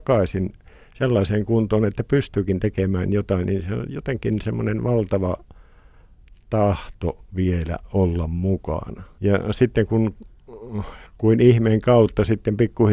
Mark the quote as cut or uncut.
cut